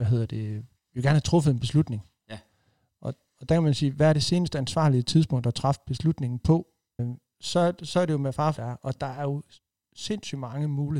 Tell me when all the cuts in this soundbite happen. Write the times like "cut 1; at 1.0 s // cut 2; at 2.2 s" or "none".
cut 1; at 7.0 s // cut 2; at 8.6 s